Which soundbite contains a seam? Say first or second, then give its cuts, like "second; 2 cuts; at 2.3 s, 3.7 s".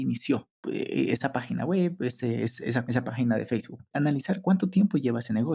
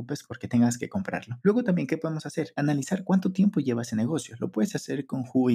first; 1 cut; at 3.9 s